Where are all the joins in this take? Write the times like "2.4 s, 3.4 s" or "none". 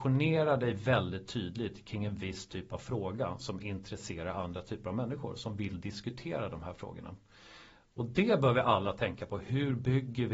none

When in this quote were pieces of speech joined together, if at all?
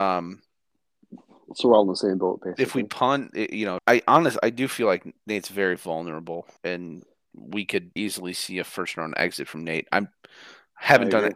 3.8 s, 6.6 s, 8.0 s

